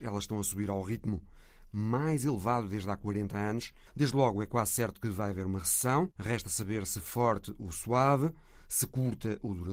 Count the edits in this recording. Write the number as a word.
one